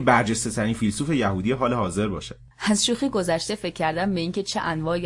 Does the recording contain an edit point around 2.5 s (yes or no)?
yes